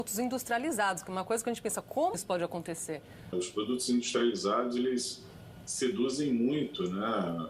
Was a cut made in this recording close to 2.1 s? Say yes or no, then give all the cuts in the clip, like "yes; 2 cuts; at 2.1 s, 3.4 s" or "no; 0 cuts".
yes; 1 cut; at 2.1 s